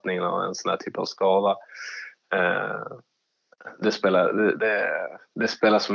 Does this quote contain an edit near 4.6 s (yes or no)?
yes